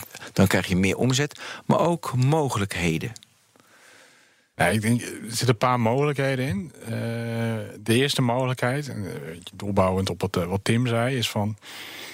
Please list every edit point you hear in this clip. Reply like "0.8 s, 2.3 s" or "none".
none